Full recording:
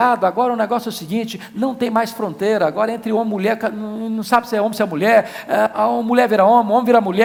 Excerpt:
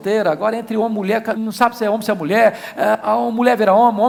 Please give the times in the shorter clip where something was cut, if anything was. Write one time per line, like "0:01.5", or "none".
0:01.4